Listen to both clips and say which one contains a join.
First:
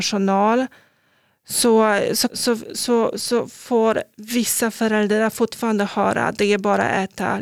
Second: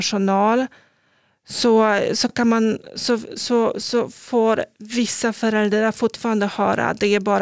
first; 1 cut; at 2.3 s

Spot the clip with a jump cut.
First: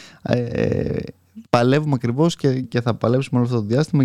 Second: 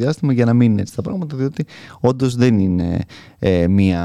first; 2 cuts; at 1.4 s, 2.6 s

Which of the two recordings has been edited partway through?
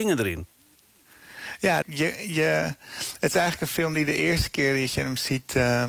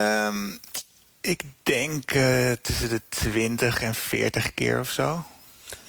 first; 1 cut; at 1.8 s

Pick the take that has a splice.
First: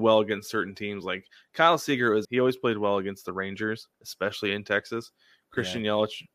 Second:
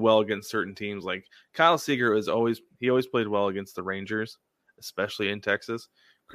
first; 2 cuts; at 2.2 s, 3.9 s

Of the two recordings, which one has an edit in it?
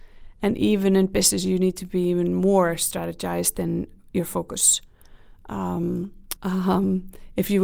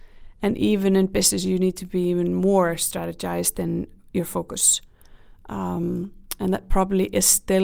first; 1 cut; at 6.4 s

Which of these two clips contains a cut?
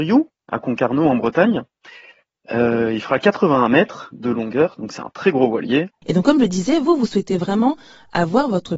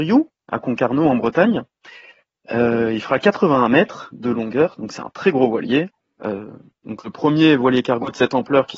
first; 1 cut; at 6.0 s

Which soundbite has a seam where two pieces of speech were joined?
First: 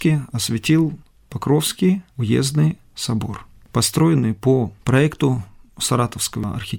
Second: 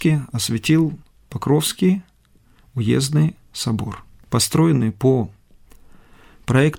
first; 2 cuts; at 2.1 s, 4.8 s

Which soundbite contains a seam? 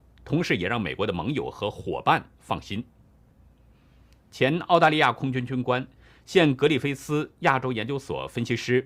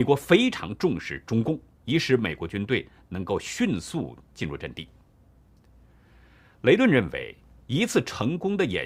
second; 1 cut; at 1.7 s

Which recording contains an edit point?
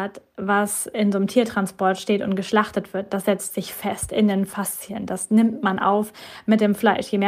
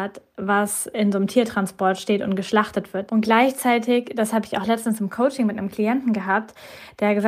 second; 1 cut; at 3.1 s

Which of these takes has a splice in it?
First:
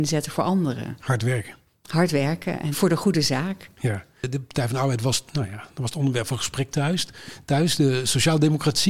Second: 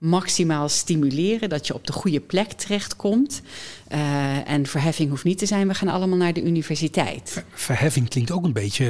first; 2 cuts; at 2.7 s, 5.3 s

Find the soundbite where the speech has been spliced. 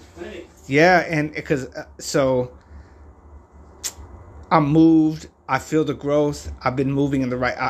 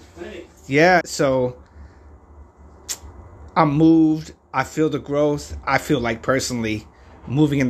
second; 2 cuts; at 1.0 s, 5.6 s

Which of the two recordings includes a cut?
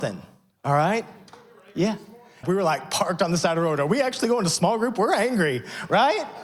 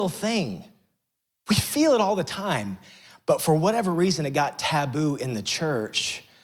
first; 1 cut; at 2.4 s

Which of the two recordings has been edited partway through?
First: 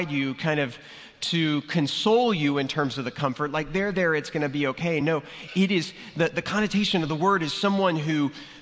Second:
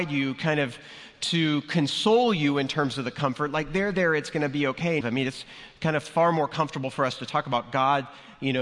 second; 1 cut; at 5.0 s

